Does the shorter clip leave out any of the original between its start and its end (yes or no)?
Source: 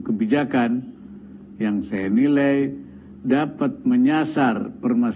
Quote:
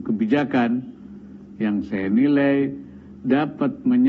no